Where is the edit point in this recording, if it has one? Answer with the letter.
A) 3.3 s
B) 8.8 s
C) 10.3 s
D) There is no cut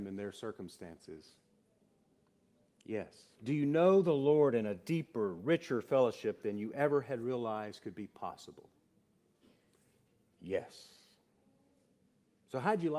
A